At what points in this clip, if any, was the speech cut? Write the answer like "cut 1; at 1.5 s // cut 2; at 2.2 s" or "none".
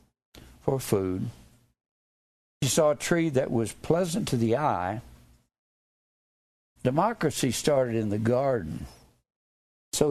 cut 1; at 6.8 s